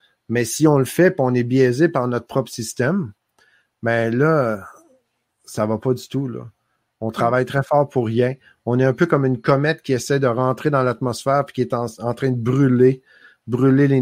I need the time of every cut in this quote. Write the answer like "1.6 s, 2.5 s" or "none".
none